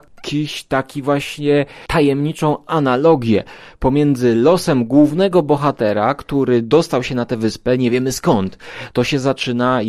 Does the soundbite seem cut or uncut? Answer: uncut